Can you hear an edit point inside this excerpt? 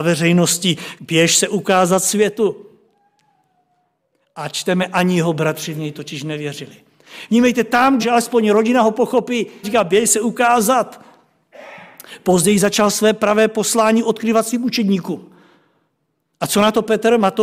yes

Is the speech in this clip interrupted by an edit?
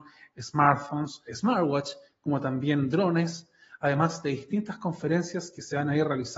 yes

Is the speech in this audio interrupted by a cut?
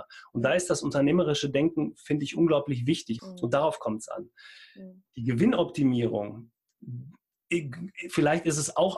yes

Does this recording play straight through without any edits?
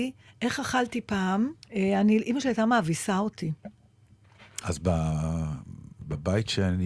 no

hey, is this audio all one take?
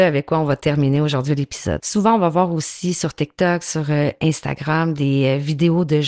no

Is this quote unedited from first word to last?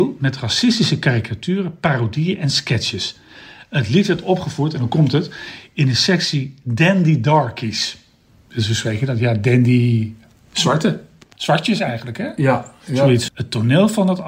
no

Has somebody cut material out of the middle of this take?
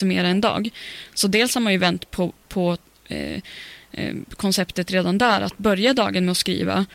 no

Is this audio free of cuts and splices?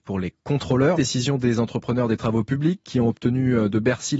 no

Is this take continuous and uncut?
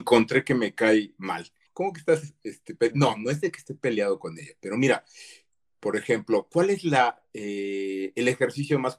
no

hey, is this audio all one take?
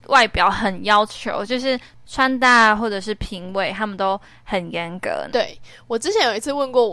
no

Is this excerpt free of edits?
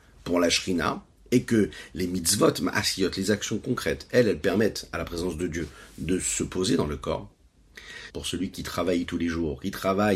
no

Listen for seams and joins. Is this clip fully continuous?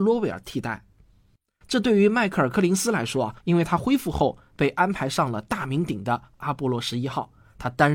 no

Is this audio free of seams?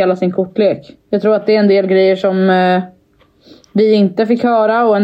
no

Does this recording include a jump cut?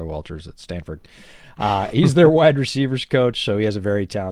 no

